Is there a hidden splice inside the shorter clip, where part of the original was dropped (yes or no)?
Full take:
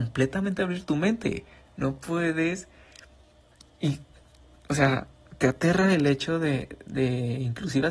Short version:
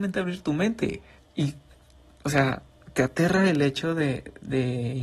yes